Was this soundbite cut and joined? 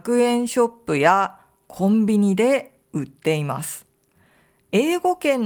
no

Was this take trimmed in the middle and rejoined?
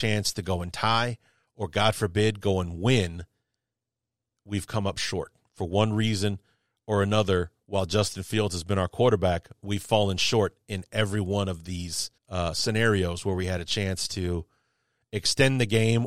yes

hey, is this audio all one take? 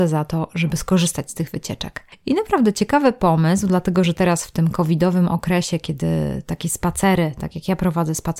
yes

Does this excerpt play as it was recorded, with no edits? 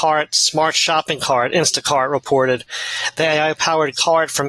yes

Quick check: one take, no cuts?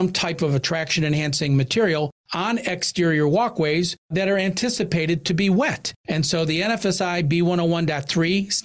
yes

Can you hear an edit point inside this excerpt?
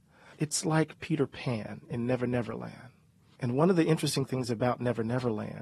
no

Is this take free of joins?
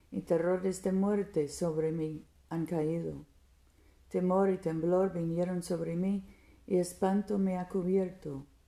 yes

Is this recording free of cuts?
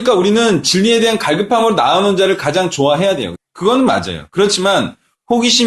no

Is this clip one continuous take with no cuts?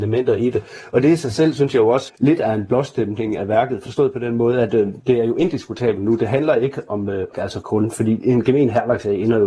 no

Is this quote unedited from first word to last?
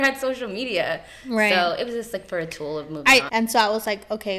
no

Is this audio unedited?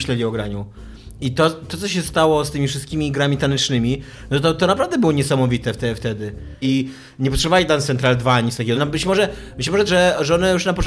no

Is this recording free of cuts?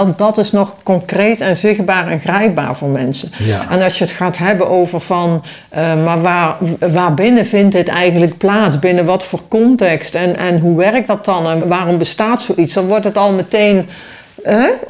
no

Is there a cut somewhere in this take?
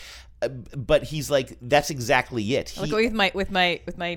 no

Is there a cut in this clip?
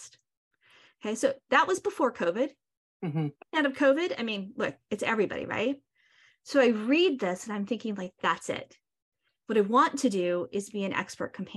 no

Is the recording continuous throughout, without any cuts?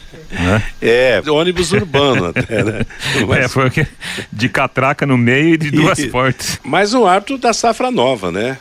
no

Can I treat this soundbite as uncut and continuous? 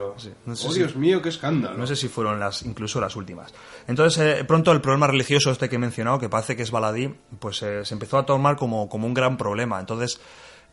yes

